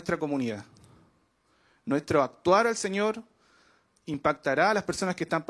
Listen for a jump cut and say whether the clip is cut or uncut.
uncut